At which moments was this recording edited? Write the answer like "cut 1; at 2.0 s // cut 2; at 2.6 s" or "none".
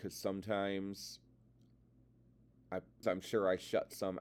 cut 1; at 3.0 s

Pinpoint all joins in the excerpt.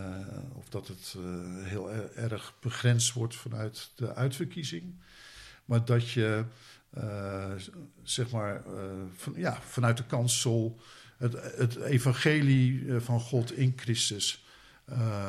none

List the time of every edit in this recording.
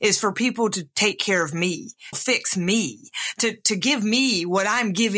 cut 1; at 2.1 s

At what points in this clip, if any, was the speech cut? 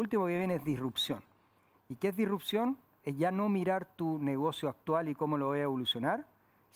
none

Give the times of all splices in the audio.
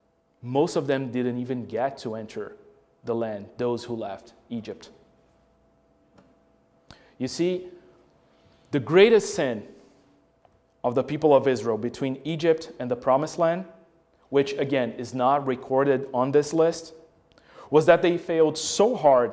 none

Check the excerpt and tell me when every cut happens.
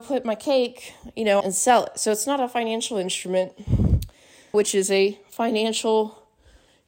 cut 1; at 1.4 s // cut 2; at 4.5 s

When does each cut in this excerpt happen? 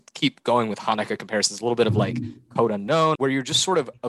cut 1; at 3.2 s

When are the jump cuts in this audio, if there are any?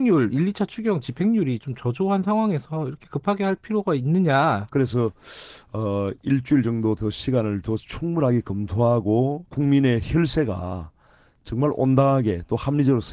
cut 1; at 4.7 s // cut 2; at 9.5 s

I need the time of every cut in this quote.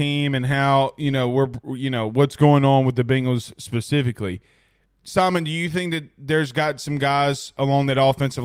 none

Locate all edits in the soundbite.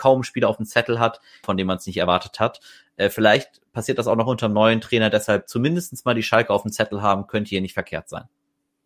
cut 1; at 1.4 s

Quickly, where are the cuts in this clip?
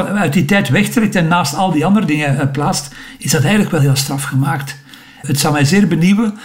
cut 1; at 3.8 s // cut 2; at 5.2 s

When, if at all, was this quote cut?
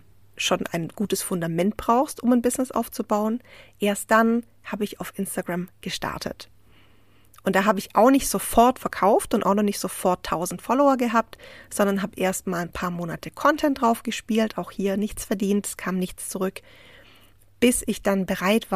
none

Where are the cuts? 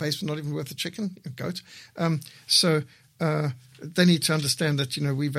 none

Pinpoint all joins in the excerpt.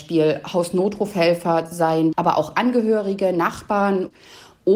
cut 1; at 2.1 s

